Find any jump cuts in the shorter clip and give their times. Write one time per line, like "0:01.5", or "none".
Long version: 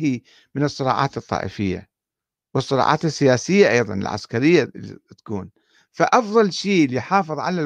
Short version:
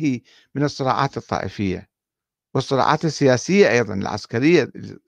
none